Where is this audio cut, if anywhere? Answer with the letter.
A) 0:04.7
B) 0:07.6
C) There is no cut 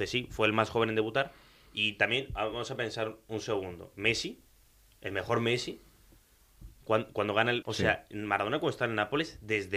B